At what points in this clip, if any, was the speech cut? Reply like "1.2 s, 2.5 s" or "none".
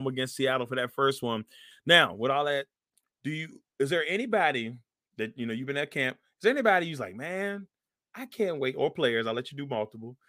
none